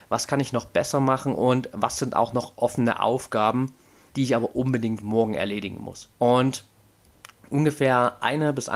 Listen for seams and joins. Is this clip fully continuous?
no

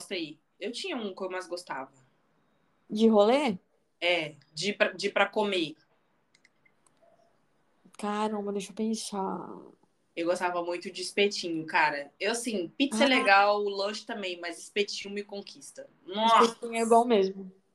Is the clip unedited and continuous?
yes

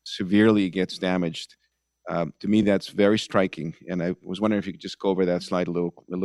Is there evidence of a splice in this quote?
no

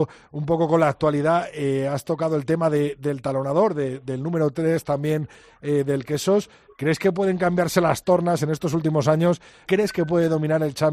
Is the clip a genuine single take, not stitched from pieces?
no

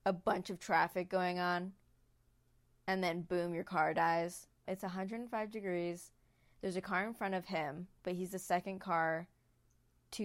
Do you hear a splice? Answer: yes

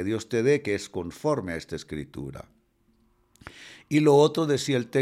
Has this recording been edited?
no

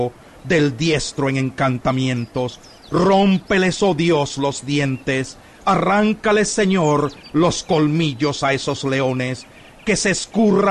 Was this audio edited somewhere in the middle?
no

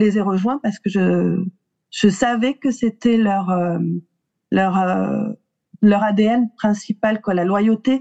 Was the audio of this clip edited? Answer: no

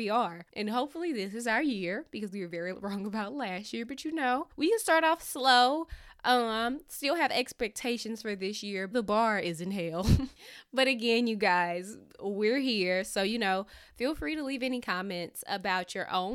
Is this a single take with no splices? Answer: no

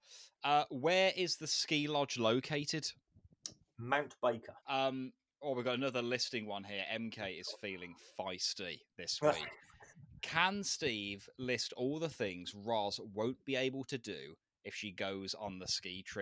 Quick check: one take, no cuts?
no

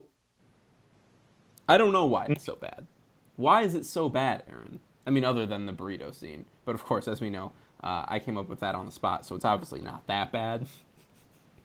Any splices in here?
no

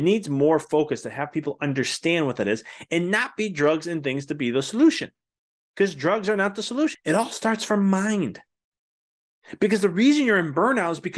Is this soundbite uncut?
no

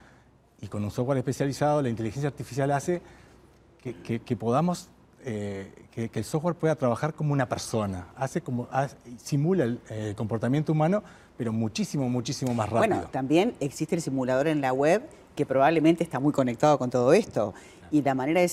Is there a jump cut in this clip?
yes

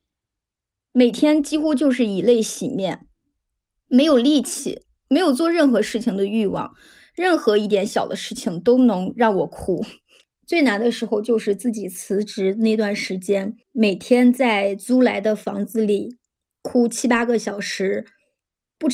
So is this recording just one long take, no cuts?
no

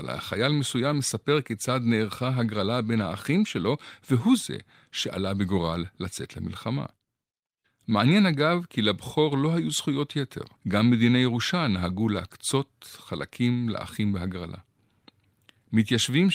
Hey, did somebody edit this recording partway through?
yes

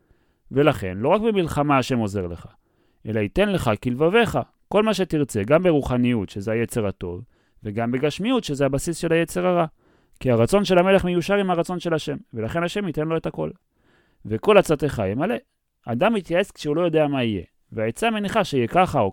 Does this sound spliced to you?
no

